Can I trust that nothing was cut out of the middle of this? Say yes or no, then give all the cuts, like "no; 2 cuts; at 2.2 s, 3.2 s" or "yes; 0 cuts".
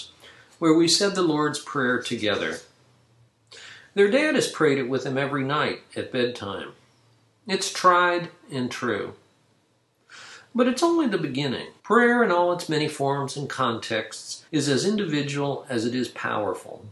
no; 2 cuts; at 11.8 s, 14.5 s